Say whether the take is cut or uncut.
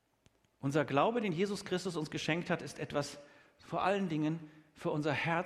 uncut